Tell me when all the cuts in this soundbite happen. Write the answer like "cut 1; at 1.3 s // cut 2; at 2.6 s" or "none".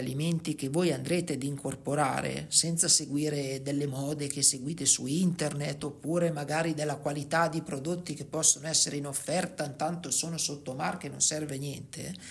none